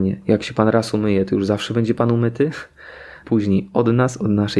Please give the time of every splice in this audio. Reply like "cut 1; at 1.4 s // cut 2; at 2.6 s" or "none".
cut 1; at 3.2 s